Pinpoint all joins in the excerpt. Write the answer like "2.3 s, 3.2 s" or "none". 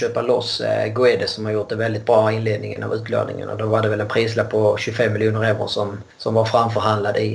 none